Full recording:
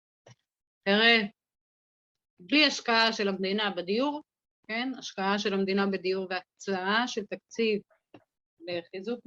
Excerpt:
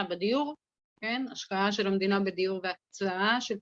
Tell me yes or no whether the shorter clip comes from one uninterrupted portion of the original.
yes